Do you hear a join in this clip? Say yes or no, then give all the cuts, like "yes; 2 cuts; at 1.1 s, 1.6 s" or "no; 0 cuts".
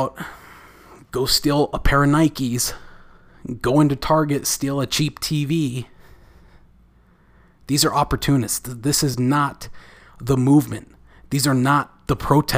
no; 0 cuts